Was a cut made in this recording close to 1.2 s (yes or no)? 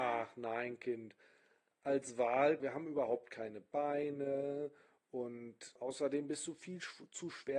no